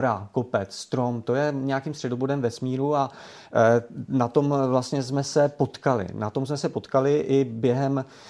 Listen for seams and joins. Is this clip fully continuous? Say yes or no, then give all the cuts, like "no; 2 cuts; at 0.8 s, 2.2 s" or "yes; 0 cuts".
yes; 0 cuts